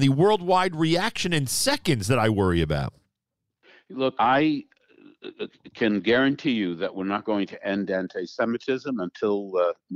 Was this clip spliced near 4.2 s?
yes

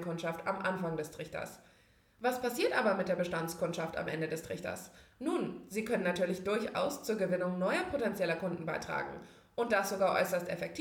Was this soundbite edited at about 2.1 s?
no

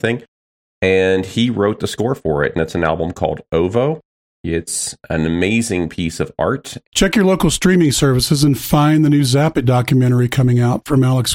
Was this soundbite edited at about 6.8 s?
yes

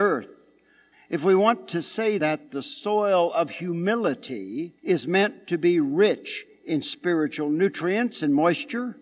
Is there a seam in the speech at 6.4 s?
no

